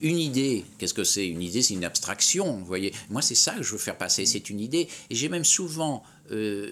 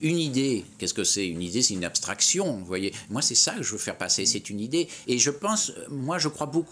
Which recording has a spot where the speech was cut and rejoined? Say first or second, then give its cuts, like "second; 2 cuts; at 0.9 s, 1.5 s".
second; 1 cut; at 5.0 s